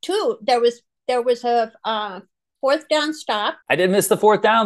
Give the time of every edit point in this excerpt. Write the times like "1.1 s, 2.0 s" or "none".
3.6 s